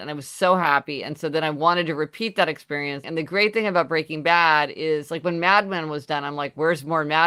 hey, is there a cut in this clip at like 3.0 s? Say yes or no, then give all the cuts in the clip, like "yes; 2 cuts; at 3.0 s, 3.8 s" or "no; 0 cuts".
yes; 1 cut; at 3.0 s